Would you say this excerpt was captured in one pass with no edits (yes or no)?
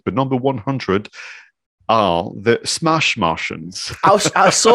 yes